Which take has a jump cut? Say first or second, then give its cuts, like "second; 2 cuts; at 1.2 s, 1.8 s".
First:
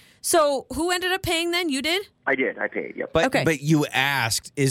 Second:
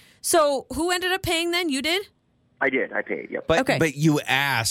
first; 1 cut; at 2.2 s